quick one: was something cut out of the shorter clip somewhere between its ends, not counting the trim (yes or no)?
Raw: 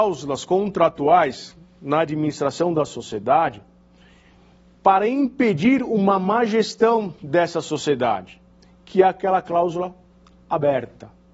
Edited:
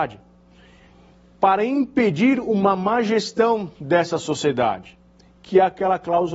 no